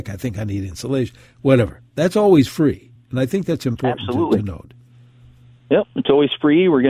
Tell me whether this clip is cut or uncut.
uncut